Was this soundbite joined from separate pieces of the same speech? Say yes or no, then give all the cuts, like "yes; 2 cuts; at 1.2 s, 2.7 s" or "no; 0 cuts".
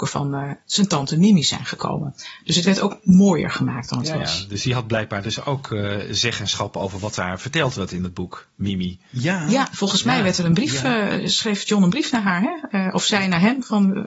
no; 0 cuts